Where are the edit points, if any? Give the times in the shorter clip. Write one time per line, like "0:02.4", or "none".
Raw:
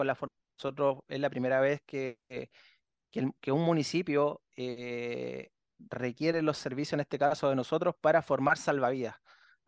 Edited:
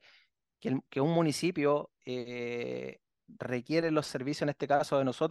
none